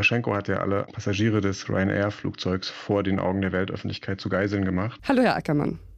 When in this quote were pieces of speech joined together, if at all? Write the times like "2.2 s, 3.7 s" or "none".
5.0 s